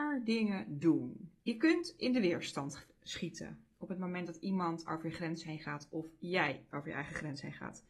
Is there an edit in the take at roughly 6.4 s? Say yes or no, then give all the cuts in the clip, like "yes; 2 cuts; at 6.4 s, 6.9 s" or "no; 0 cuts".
no; 2 cuts; at 1.4 s, 3.7 s